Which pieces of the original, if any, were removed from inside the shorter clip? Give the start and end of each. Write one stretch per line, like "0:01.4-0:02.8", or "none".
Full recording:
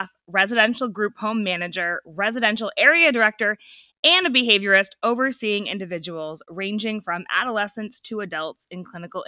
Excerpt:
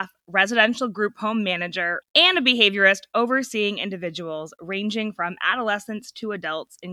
0:02.0-0:03.9